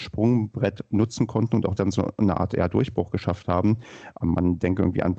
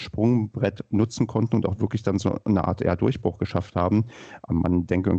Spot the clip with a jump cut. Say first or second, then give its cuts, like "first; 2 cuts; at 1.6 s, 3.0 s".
first; 1 cut; at 1.8 s